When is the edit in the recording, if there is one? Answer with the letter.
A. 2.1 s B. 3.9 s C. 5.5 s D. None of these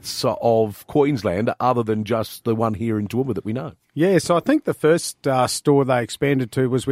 D